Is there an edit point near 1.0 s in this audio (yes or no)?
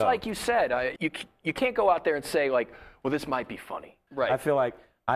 yes